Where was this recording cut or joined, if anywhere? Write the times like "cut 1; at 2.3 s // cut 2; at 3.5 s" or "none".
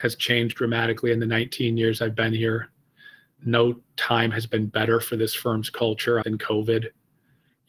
cut 1; at 6.2 s